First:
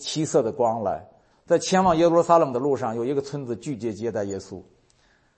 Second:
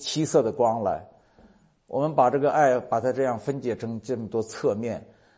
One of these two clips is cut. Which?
first; 1 cut; at 1.3 s

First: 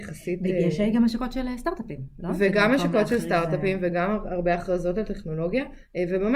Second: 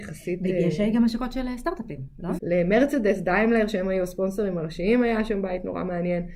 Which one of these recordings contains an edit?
second; 1 cut; at 2.4 s

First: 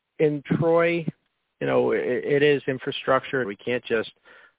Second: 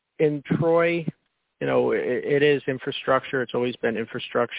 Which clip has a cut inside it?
first; 1 cut; at 3.4 s

